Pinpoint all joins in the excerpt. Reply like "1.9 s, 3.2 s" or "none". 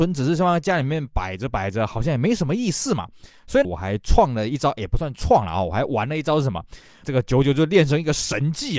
3.6 s, 7.0 s